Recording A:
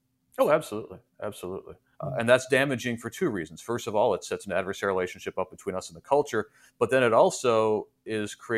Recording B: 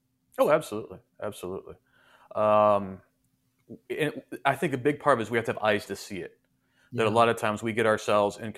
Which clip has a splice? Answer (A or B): A